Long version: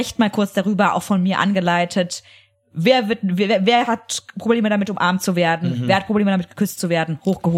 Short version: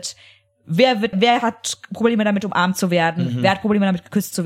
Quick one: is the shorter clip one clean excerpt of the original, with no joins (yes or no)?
no